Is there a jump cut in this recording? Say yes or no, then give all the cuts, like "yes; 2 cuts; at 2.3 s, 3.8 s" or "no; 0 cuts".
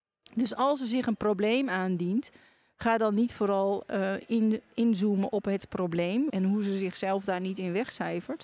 yes; 1 cut; at 6.3 s